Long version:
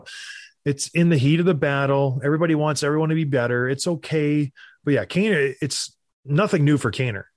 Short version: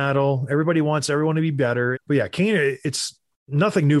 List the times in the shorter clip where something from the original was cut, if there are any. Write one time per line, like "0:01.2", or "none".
0:01.9

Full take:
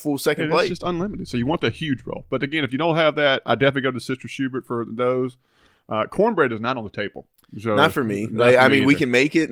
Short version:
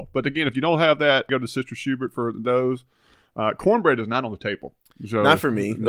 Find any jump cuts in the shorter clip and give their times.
0:01.3

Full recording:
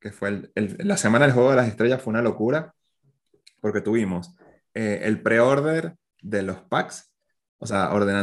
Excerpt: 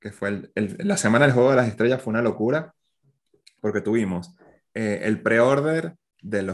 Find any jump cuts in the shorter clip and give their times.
none

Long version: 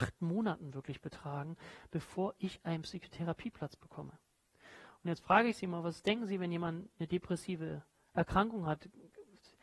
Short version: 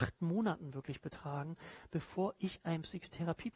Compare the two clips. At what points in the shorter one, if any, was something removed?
none

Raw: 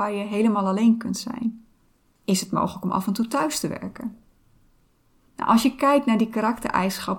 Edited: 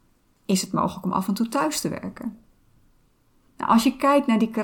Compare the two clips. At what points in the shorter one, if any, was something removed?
none

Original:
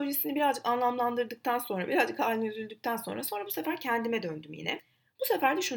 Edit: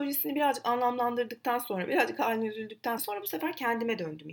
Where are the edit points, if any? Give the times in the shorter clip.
0:03.0

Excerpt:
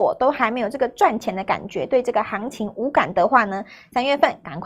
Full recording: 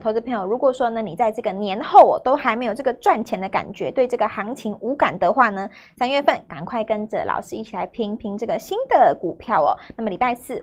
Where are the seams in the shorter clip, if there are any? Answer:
none

